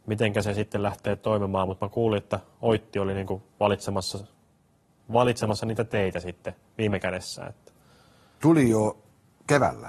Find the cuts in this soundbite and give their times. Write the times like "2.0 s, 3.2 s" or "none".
8.4 s

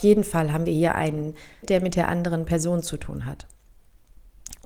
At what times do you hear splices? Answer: 1.6 s

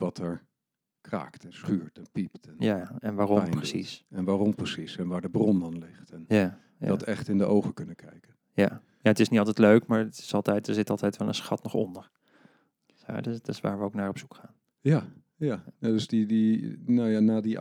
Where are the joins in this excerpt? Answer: none

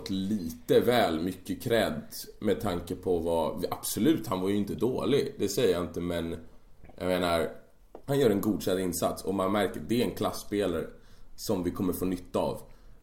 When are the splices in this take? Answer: 8.0 s

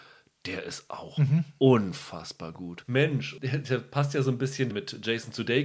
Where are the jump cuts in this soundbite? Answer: 2.8 s, 4.7 s

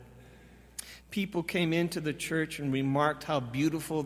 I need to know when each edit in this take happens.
1.0 s

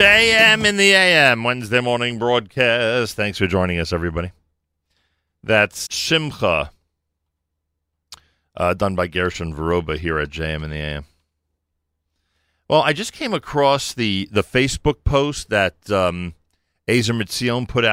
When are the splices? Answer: 5.9 s

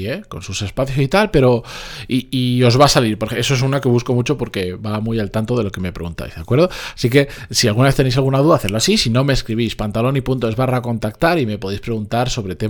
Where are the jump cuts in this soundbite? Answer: none

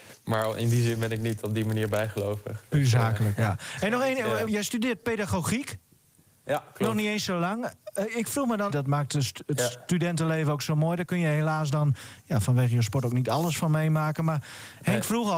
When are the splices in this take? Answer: 4.5 s, 8.7 s

